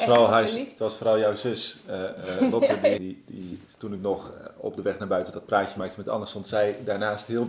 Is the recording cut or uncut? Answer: cut